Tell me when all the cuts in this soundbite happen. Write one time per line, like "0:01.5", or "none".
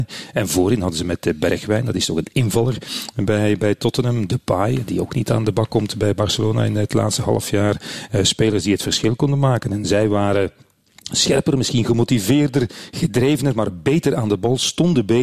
none